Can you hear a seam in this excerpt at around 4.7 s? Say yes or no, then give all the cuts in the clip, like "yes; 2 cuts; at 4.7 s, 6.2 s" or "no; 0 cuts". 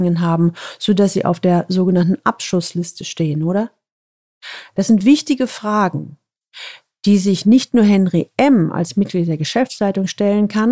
yes; 1 cut; at 4.7 s